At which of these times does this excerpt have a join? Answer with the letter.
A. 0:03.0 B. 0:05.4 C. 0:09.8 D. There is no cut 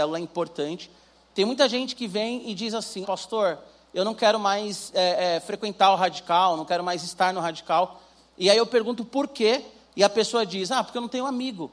A